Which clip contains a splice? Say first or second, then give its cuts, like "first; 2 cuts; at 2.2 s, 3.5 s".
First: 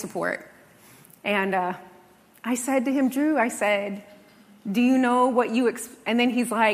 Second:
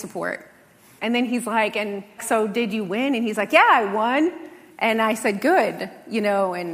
second; 2 cuts; at 1.0 s, 2.2 s